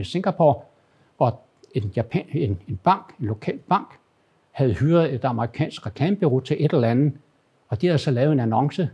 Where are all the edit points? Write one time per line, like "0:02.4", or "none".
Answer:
none